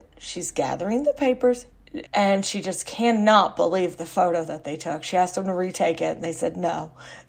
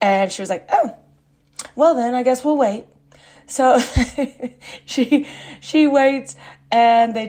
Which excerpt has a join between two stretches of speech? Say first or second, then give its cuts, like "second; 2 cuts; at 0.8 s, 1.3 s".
first; 1 cut; at 2.1 s